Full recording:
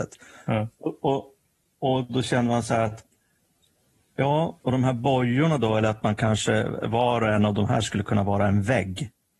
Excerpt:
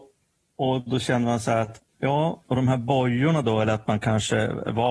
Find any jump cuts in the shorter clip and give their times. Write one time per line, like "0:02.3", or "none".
0:01.9